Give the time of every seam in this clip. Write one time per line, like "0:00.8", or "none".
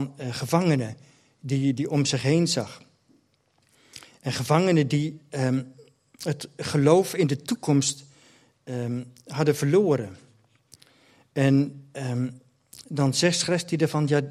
none